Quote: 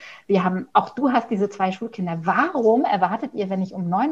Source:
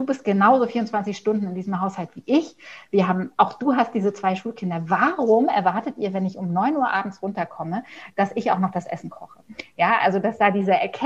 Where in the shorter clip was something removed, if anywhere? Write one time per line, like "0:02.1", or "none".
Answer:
none